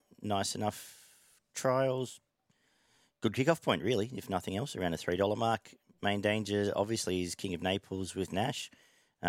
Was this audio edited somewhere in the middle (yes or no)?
no